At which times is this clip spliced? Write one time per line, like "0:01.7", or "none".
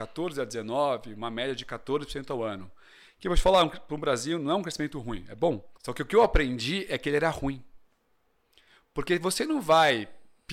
0:05.7